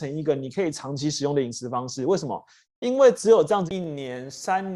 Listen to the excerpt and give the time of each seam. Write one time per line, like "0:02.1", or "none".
0:03.7